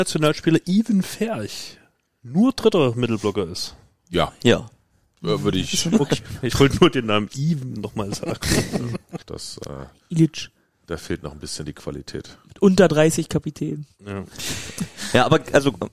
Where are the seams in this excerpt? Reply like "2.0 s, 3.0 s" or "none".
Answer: 9.2 s